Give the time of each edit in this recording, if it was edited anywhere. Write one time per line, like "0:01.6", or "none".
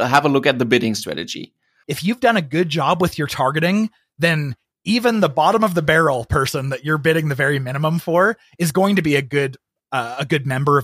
0:01.8